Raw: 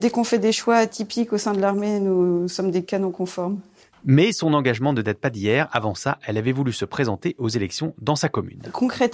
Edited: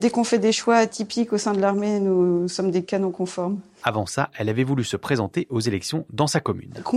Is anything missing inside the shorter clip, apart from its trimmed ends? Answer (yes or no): yes